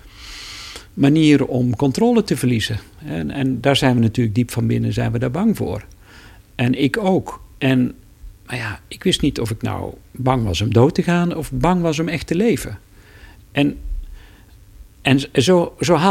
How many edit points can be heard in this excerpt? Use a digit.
1